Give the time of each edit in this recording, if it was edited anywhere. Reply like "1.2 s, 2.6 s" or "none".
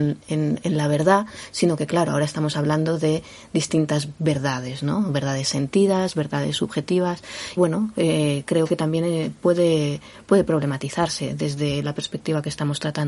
7.6 s